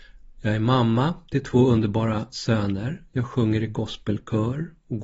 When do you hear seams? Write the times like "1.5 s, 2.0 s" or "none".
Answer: none